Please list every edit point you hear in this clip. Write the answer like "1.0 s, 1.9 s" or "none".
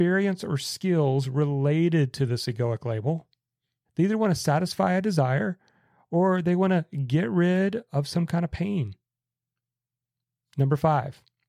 3.9 s